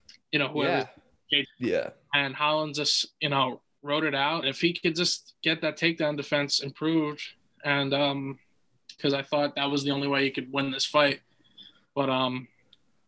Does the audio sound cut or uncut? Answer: cut